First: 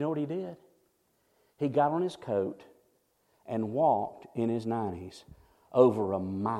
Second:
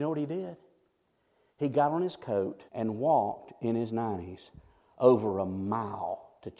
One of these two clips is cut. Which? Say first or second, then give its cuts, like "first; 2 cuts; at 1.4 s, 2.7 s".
second; 1 cut; at 2.7 s